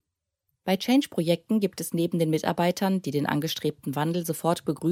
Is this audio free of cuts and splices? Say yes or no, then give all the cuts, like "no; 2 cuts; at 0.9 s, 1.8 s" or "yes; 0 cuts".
yes; 0 cuts